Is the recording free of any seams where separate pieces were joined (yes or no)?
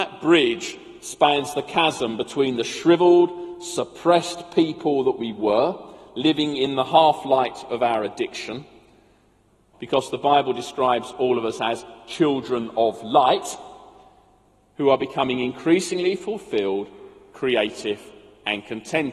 no